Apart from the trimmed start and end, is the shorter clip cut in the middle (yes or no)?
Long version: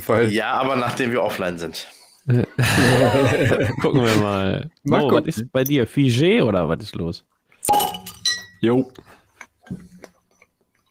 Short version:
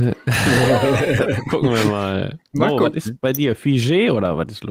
no